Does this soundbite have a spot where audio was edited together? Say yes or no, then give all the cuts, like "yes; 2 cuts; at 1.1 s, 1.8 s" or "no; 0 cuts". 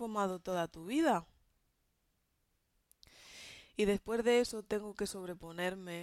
no; 0 cuts